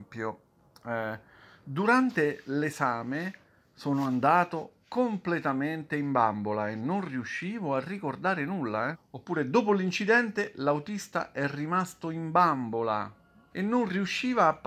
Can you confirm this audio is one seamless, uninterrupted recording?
no; 2 cuts; at 8.9 s, 13.5 s

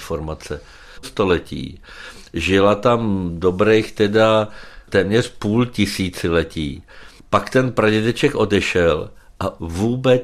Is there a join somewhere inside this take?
yes; 1 cut; at 1.0 s

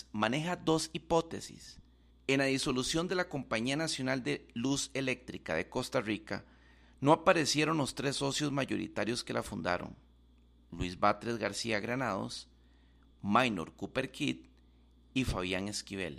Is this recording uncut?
no; 1 cut; at 2.1 s

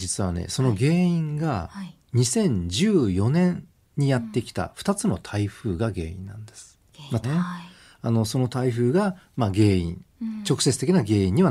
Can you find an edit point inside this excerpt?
yes; 1 cut; at 7.2 s

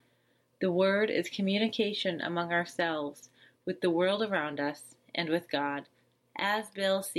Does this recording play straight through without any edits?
no; 1 cut; at 6.2 s

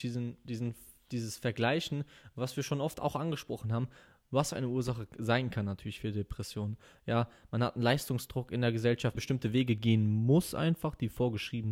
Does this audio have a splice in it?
yes; 2 cuts; at 7.0 s, 9.2 s

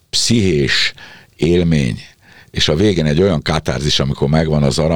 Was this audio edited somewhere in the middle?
no; 0 cuts

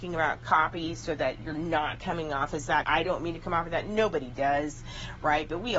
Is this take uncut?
no; 1 cut; at 2.8 s

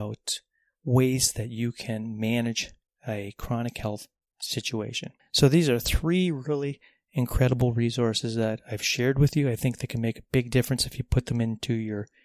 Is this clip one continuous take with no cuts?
yes; 0 cuts

